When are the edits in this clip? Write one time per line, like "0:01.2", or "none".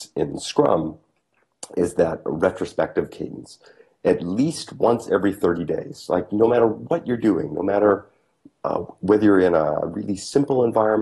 none